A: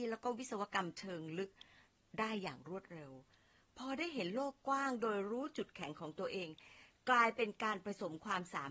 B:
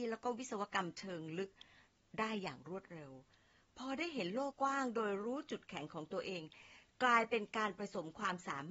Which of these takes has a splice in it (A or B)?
B